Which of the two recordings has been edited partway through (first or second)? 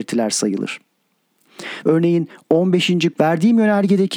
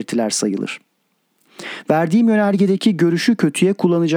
first